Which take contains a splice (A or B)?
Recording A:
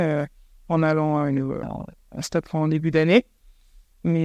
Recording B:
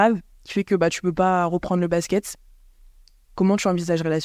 A